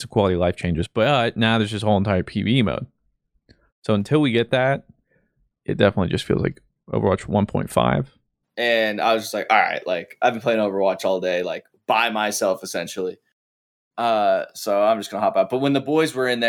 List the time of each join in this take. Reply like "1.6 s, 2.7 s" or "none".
8.4 s